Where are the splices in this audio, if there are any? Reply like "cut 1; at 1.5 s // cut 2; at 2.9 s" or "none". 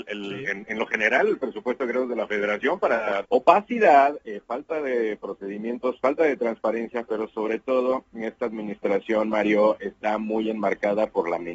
cut 1; at 3.2 s